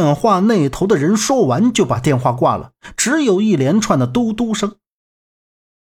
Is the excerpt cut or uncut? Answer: uncut